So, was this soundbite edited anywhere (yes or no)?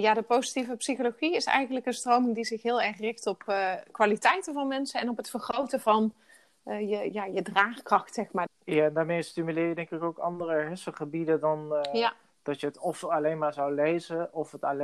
yes